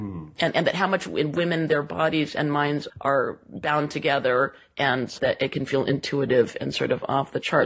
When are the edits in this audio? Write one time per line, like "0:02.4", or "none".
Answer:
0:02.9
0:05.2